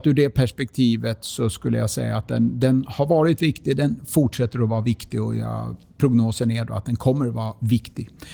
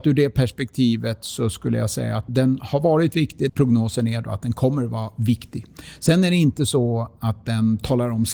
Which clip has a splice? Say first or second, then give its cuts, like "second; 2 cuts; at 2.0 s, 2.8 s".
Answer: second; 2 cuts; at 2.3 s, 3.5 s